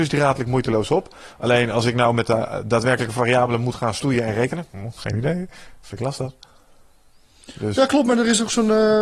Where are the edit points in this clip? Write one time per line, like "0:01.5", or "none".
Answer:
none